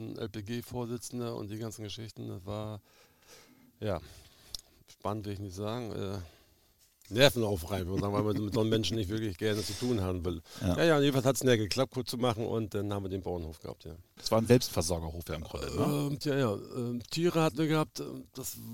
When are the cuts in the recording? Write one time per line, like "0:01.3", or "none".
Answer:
0:14.2
0:16.2

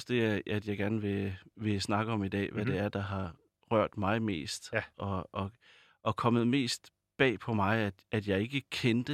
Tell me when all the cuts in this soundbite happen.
none

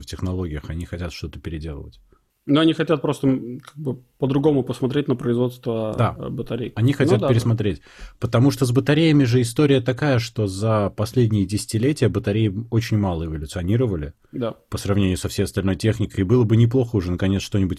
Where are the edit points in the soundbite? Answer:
none

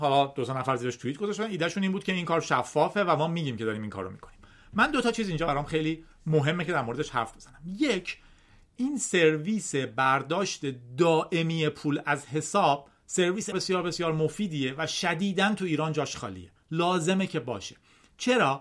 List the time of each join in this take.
0:13.5

